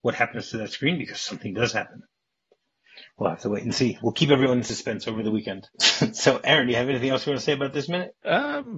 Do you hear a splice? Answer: no; 0 cuts

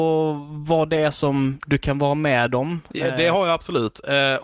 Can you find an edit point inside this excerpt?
no; 0 cuts

